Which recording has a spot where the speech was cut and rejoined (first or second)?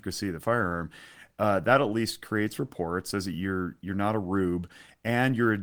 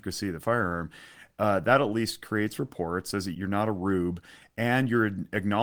second